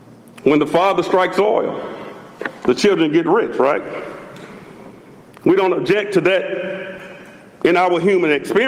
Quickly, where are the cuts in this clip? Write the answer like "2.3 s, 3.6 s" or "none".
none